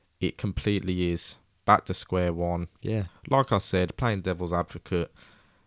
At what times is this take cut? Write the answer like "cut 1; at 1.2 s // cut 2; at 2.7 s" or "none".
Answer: cut 1; at 3.1 s